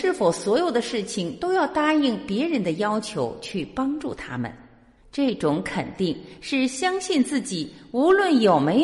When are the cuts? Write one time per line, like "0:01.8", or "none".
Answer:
0:05.0